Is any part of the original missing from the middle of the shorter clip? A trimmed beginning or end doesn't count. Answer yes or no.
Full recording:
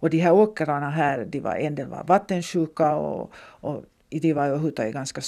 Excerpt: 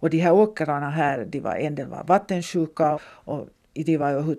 yes